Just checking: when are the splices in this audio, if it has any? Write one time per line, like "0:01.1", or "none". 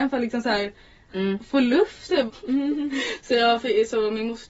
0:02.3